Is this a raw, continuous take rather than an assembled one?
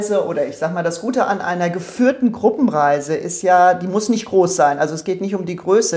yes; 0 cuts

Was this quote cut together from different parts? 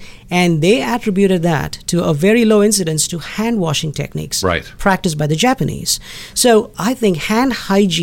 no; 0 cuts

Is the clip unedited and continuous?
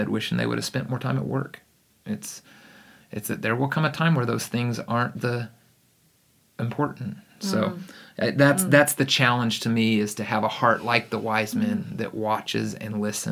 yes; 0 cuts

